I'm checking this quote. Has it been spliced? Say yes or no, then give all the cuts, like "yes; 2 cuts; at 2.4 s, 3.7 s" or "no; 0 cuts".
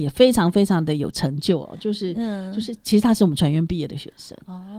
no; 0 cuts